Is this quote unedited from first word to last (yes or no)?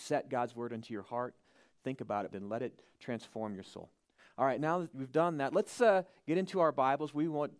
no